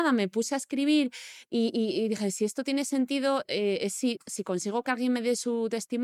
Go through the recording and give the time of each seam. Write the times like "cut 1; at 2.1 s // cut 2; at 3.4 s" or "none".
cut 1; at 4.2 s